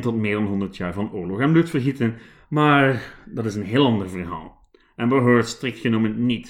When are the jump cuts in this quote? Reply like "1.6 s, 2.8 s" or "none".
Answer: none